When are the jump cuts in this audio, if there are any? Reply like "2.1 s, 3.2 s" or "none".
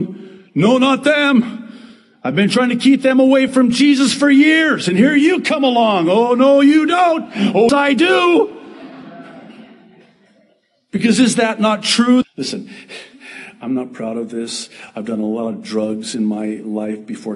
7.7 s, 12.2 s